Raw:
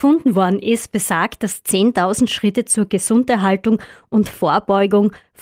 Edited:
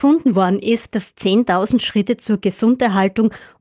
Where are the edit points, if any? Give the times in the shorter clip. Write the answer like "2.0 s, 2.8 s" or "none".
0.9 s